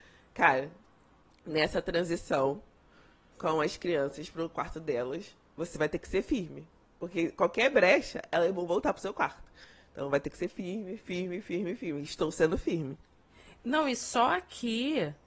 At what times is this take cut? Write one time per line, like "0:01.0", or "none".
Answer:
none

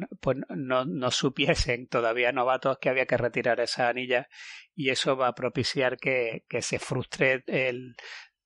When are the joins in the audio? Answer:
none

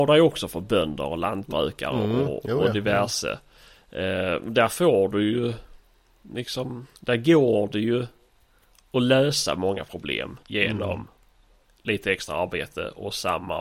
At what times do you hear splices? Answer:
0:07.0
0:10.4

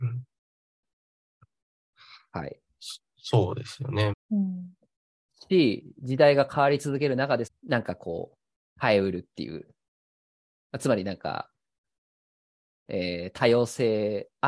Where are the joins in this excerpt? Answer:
0:04.1
0:07.5

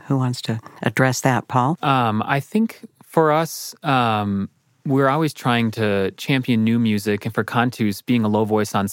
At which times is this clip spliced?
0:01.8

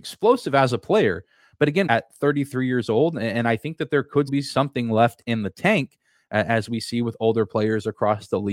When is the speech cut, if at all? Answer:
0:01.9
0:04.3

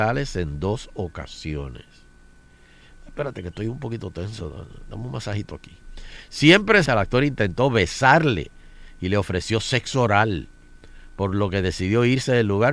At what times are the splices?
0:06.9

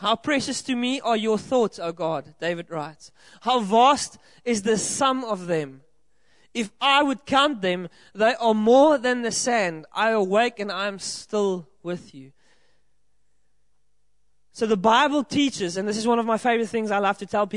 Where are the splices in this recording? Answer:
none

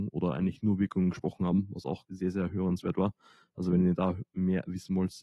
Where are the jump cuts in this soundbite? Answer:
0:02.1

